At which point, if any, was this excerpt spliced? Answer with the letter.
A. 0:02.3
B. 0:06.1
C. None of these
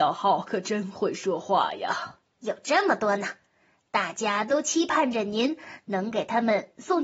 A